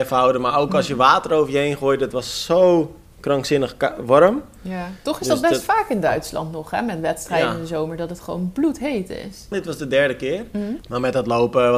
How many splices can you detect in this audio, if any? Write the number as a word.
two